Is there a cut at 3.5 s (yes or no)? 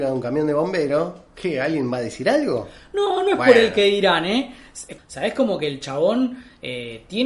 no